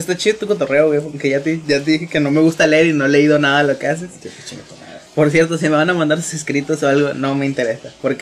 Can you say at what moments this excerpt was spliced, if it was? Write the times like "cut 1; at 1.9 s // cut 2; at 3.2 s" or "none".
cut 1; at 5.1 s // cut 2; at 7.1 s